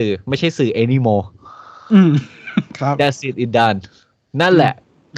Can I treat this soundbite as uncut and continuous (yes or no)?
yes